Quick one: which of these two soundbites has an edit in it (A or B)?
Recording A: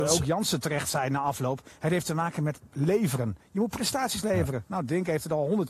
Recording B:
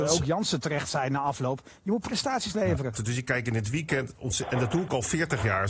B